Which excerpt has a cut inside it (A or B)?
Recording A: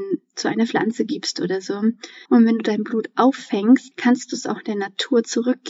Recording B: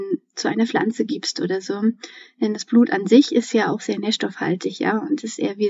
A